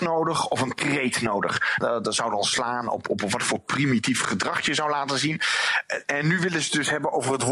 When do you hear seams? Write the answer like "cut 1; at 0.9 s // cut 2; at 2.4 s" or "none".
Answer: cut 1; at 1.8 s // cut 2; at 6.0 s